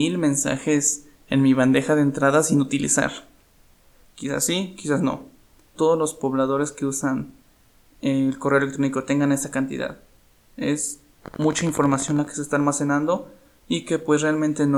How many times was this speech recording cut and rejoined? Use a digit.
2